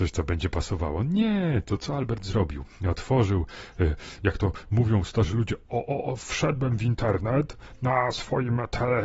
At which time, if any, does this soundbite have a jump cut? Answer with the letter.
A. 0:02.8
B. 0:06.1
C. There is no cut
C